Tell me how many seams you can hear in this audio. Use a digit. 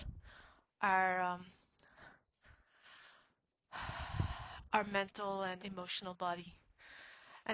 1